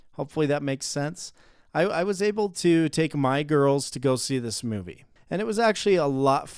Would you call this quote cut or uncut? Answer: cut